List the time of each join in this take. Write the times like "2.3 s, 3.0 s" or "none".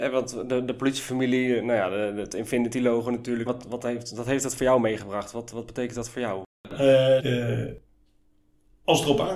3.5 s, 7.2 s